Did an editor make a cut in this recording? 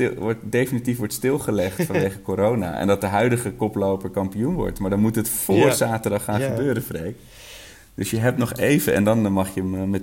no; 0 cuts

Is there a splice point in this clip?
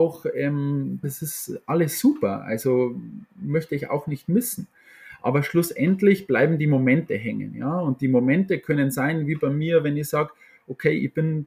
yes; 1 cut; at 1.0 s

